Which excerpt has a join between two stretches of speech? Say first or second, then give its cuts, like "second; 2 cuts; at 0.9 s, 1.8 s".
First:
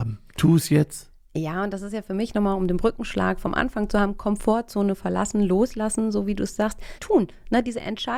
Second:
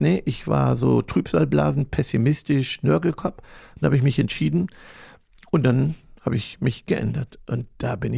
first; 1 cut; at 7.0 s